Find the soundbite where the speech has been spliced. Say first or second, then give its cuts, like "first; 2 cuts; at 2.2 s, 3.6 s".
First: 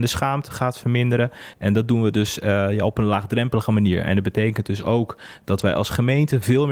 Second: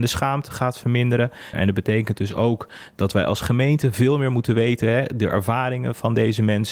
second; 1 cut; at 1.5 s